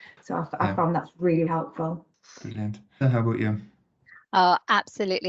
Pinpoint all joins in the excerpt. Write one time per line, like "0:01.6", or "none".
0:01.5
0:03.0